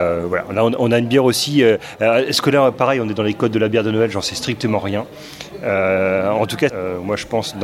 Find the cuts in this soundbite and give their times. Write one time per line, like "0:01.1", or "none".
0:06.7